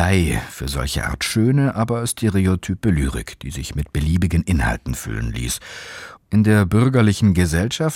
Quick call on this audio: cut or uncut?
cut